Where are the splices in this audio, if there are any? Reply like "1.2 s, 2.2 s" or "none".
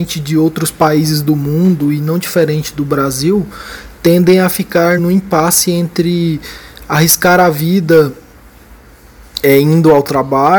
5.0 s